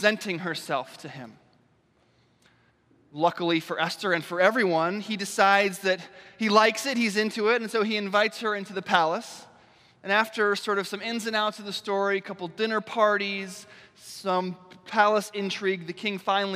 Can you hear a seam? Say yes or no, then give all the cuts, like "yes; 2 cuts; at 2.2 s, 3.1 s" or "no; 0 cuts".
no; 0 cuts